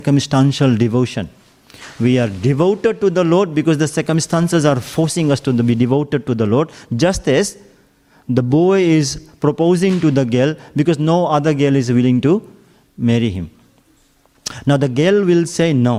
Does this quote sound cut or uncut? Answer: uncut